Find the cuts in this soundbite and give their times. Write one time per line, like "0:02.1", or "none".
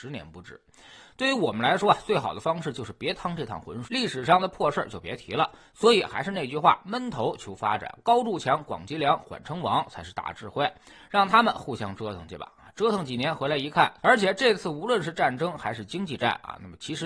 0:03.9
0:14.0